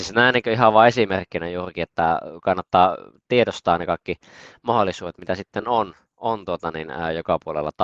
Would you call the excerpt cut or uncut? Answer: uncut